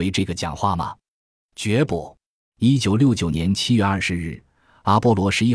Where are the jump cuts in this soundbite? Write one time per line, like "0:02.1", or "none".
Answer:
0:02.4